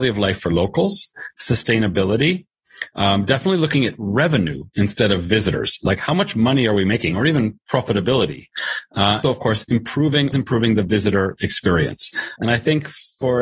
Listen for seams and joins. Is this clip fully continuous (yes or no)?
no